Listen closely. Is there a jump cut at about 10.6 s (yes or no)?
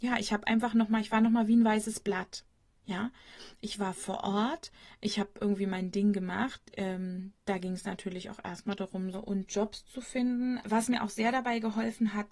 yes